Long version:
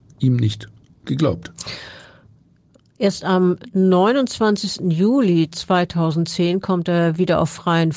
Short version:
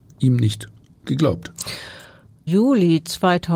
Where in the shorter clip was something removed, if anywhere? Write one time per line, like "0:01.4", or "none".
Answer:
0:02.5